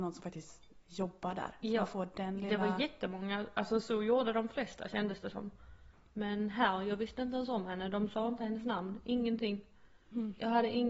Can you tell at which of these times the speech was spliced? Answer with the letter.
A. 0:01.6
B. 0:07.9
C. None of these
C